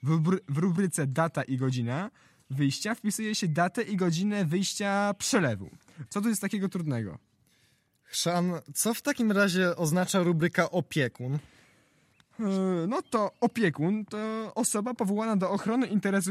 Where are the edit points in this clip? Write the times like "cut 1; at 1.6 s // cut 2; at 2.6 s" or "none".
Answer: cut 1; at 6.1 s